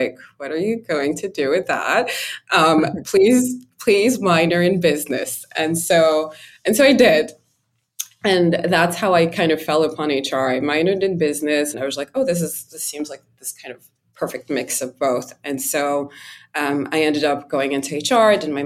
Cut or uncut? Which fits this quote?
cut